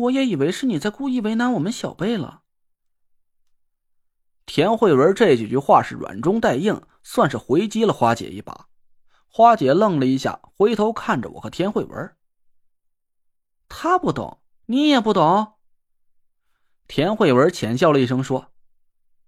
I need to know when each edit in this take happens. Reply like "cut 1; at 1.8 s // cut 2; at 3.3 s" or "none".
none